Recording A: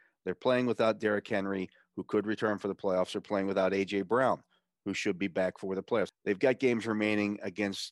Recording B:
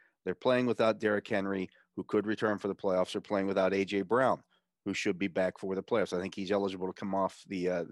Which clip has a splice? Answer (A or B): A